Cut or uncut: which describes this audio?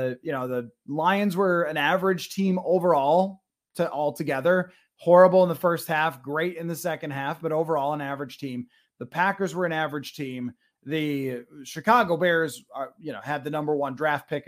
uncut